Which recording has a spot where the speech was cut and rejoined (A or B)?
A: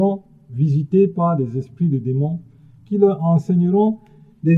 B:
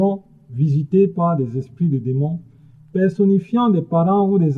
A